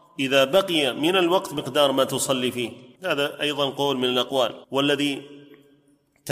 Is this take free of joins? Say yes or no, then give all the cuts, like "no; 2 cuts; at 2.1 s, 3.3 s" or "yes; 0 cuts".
no; 2 cuts; at 2.9 s, 4.6 s